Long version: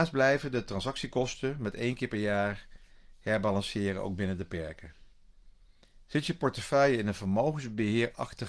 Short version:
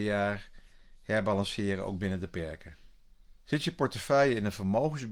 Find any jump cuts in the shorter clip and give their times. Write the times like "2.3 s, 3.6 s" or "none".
3.4 s